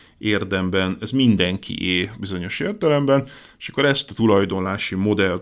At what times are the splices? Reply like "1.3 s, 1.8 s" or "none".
none